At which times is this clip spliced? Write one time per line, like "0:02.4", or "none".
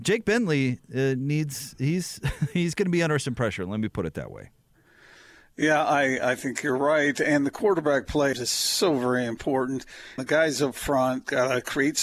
0:08.3
0:10.2